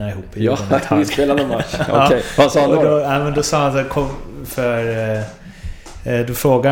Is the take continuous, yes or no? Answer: yes